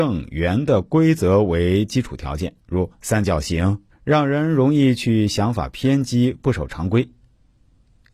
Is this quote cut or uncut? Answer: cut